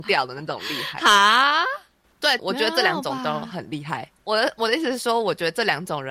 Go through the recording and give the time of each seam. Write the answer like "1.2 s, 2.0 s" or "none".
2.4 s, 4.2 s